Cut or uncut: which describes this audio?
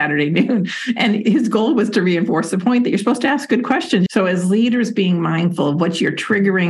cut